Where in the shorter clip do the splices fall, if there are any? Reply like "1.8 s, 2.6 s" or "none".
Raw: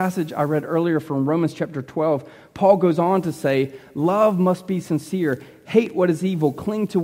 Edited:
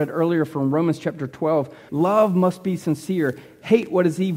1.9 s